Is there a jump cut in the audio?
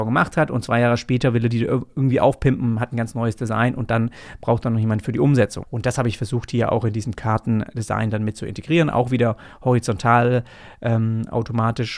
yes; 1 cut; at 5.6 s

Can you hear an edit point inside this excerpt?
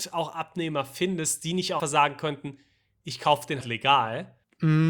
yes; 2 cuts; at 1.8 s, 3.6 s

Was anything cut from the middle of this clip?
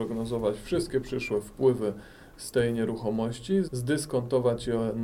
yes; 1 cut; at 3.6 s

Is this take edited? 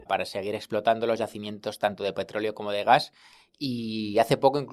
no; 0 cuts

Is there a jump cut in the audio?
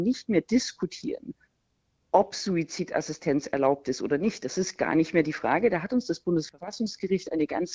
no; 0 cuts

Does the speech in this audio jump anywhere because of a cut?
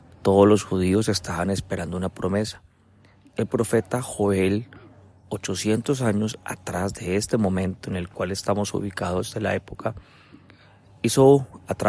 no; 0 cuts

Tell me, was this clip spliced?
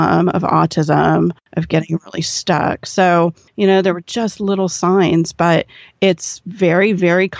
no; 0 cuts

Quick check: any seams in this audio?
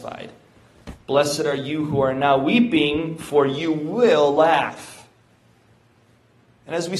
no; 0 cuts

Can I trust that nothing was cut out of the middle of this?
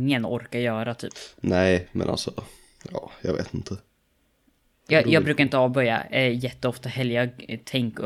yes; 0 cuts

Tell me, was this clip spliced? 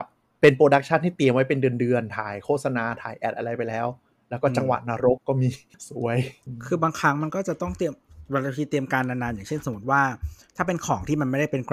yes; 1 cut; at 5.2 s

